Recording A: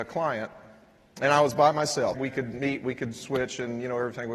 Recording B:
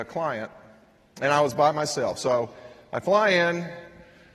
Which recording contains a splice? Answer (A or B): A